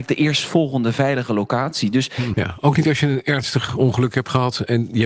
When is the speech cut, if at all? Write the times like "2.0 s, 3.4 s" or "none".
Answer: 2.3 s